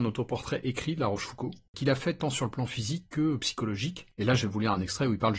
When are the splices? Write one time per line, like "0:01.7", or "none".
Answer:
0:01.7